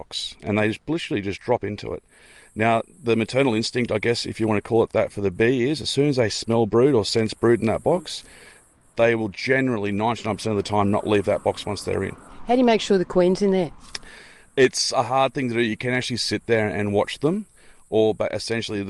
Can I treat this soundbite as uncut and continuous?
yes; 0 cuts

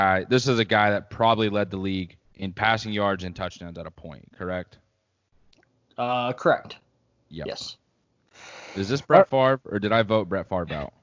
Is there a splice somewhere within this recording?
yes; 1 cut; at 2.2 s

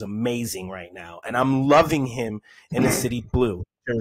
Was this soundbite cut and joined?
no; 0 cuts

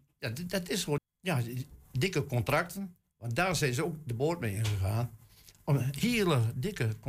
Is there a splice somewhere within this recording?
yes; 1 cut; at 1.0 s

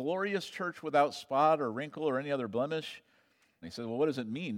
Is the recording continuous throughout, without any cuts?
no; 1 cut; at 3.6 s

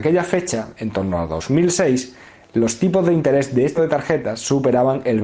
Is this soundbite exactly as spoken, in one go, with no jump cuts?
no; 1 cut; at 3.8 s

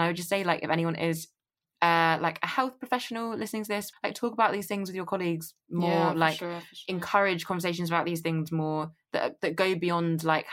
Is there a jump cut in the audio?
yes; 1 cut; at 3.9 s

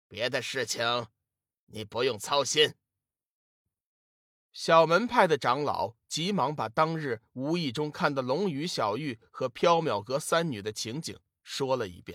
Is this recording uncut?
yes; 0 cuts

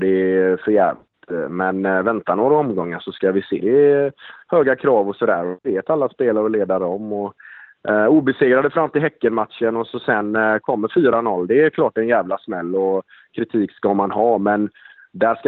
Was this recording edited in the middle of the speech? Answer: yes; 1 cut; at 3.6 s

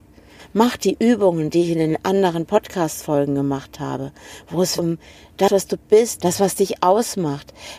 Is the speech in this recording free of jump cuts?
no; 2 cuts; at 4.8 s, 6.2 s

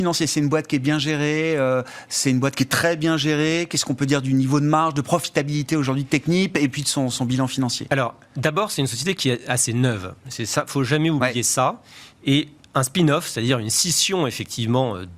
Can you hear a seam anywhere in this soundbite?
no; 0 cuts

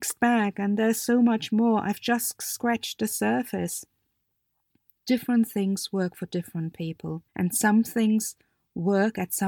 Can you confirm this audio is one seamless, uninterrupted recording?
no; 1 cut; at 7.3 s

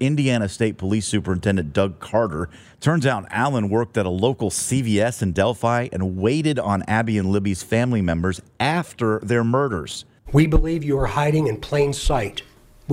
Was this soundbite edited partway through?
yes; 2 cuts; at 2.6 s, 10.3 s

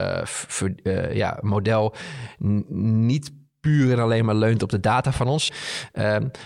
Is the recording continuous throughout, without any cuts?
no; 1 cut; at 5.5 s

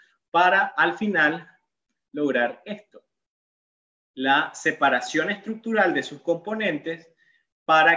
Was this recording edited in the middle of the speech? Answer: no; 0 cuts

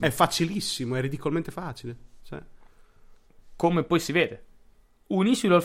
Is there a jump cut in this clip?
no; 0 cuts

